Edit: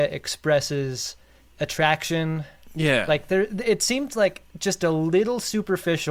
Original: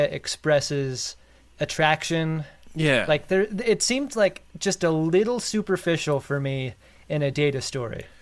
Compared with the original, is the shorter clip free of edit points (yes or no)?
yes